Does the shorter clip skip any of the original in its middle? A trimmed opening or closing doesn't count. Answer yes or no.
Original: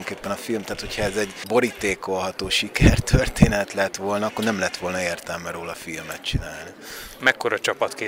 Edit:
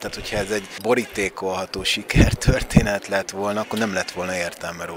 no